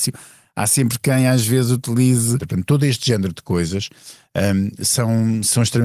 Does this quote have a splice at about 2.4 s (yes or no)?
yes